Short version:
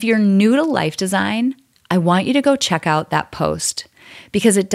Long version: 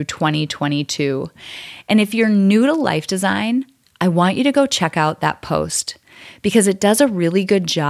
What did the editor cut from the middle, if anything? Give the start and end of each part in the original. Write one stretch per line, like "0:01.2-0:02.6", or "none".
none